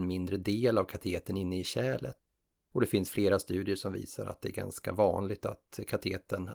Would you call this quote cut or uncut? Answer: uncut